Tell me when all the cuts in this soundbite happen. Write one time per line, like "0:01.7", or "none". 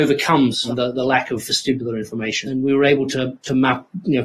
0:02.5